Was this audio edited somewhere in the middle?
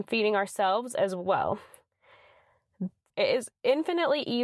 yes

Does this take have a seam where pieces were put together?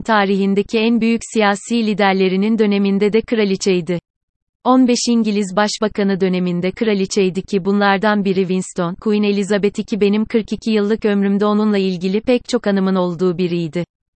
yes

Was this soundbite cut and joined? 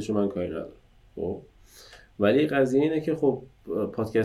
no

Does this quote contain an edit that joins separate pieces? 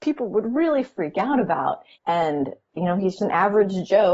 yes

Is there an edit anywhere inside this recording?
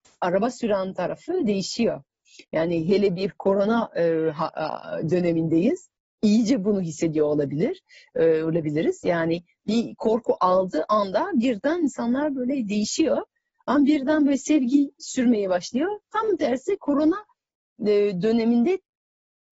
no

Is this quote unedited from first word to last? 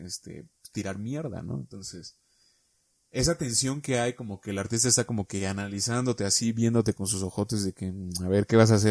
yes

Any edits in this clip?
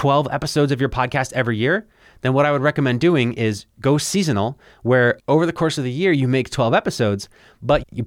no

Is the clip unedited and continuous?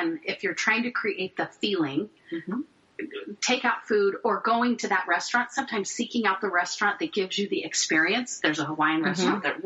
yes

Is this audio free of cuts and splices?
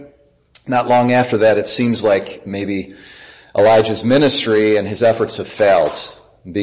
yes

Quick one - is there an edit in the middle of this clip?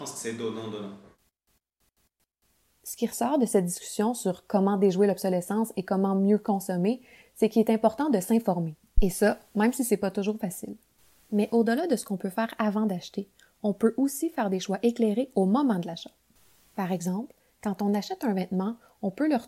no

